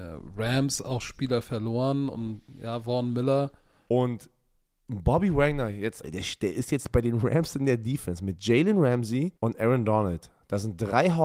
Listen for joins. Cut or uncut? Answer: cut